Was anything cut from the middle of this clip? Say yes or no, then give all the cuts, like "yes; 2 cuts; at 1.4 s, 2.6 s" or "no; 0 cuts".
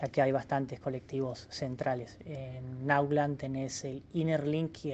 no; 0 cuts